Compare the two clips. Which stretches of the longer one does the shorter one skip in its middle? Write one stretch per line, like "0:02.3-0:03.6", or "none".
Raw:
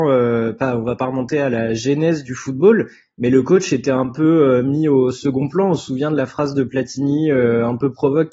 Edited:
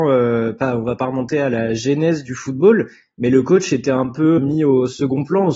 0:04.4-0:04.6